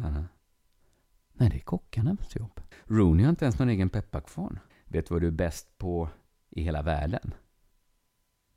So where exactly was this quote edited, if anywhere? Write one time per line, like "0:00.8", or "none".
0:02.7
0:04.7